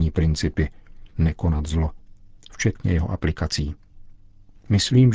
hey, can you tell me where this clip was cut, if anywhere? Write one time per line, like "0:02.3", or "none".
0:01.1